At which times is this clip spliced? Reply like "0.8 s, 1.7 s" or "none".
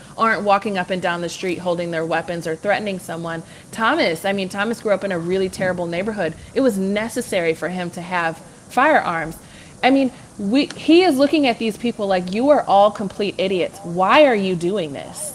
none